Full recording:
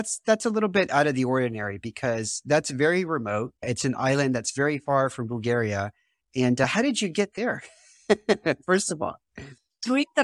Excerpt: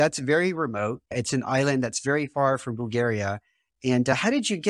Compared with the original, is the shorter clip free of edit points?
yes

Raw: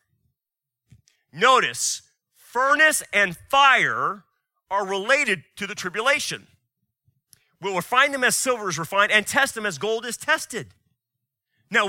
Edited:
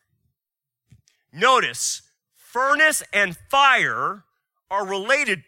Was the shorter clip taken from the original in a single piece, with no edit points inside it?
yes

